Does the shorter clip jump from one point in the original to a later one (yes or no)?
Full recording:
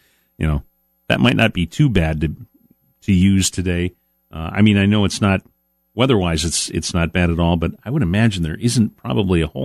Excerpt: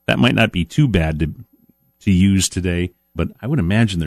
yes